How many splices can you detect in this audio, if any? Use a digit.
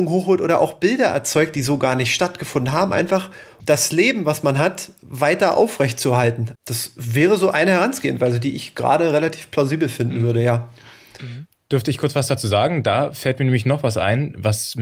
3